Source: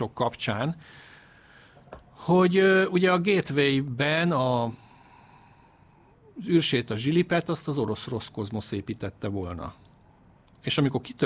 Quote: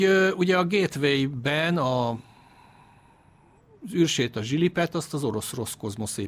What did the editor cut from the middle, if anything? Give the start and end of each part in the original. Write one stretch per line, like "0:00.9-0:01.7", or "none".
none